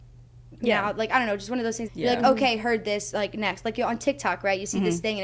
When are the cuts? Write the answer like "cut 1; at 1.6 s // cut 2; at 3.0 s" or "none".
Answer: cut 1; at 1.9 s